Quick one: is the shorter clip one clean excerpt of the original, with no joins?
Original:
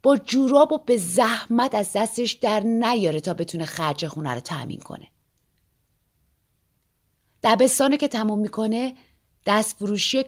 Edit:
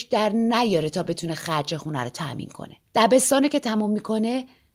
no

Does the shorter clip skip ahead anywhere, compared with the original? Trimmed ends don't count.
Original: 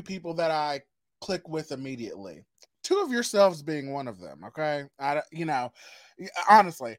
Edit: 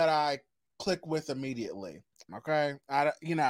yes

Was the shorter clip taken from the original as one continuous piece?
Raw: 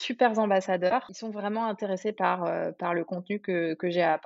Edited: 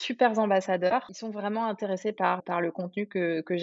no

